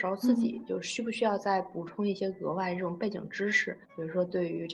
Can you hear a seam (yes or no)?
yes